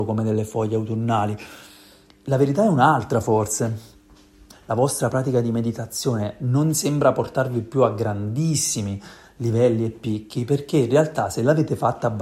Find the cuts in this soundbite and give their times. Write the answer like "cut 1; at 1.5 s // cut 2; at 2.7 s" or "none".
cut 1; at 4.5 s